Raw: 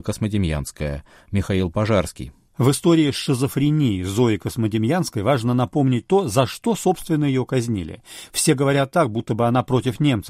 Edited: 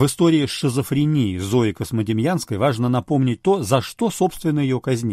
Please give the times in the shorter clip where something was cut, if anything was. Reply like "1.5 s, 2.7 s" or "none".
none